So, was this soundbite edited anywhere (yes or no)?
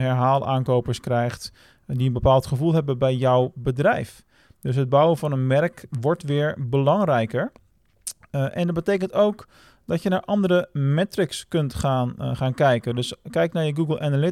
no